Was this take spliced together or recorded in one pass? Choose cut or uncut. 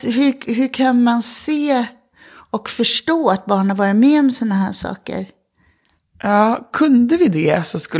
uncut